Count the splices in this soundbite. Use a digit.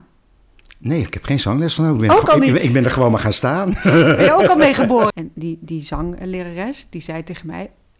1